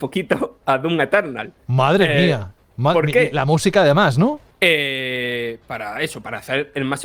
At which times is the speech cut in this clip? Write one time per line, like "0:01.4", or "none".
0:01.6
0:04.5